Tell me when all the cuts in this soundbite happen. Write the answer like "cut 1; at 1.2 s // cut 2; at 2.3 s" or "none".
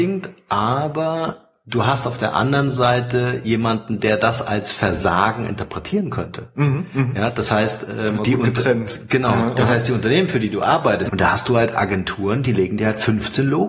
cut 1; at 8.2 s // cut 2; at 11.1 s